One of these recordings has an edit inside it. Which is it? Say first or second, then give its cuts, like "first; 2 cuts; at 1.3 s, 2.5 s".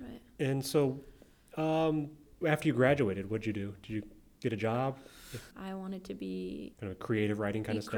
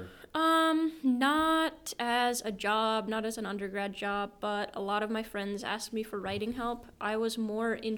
first; 3 cuts; at 2.4 s, 5.5 s, 6.7 s